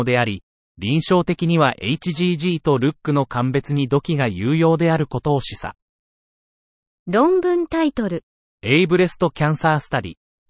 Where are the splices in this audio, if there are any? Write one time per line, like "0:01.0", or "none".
0:08.4